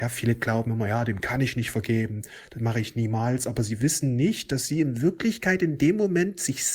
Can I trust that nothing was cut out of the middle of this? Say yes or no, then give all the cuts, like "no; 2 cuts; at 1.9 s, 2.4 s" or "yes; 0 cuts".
yes; 0 cuts